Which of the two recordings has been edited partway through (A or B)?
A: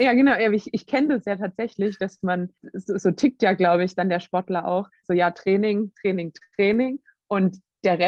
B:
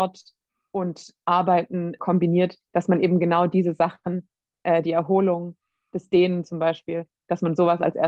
A